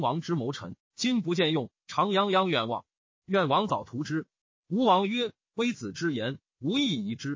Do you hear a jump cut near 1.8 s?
no; 0 cuts

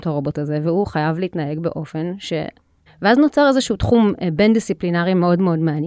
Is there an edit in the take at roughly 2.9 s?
yes; 1 cut; at 2.9 s

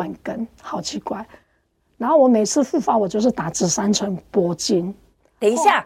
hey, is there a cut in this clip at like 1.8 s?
no; 0 cuts

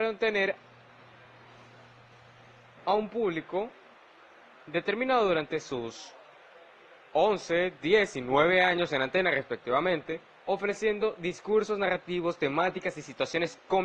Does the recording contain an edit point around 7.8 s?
no; 0 cuts

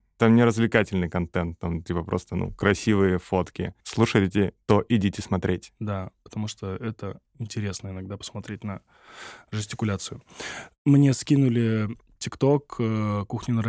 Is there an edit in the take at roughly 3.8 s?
yes; 1 cut; at 3.8 s

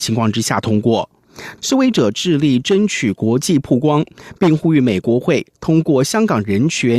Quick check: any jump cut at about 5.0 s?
yes; 2 cuts; at 1.6 s, 5.0 s

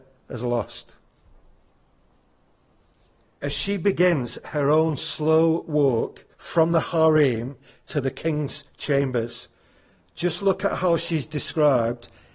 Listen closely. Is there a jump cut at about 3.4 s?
yes; 2 cuts; at 3.4 s, 6.3 s

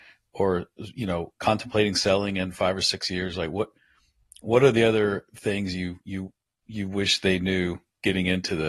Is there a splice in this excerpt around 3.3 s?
no; 0 cuts

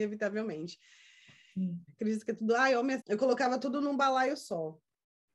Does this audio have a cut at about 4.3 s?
no; 2 cuts; at 1.9 s, 3.0 s

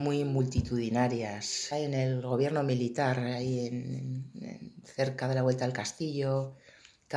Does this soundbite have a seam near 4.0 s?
no; 1 cut; at 1.7 s

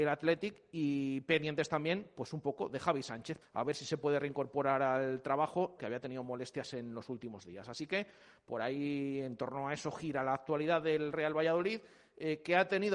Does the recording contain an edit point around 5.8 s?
yes; 2 cuts; at 3.4 s, 5.8 s

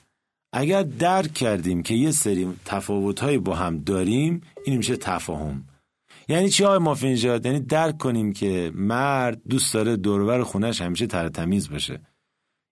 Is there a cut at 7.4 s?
no; 0 cuts

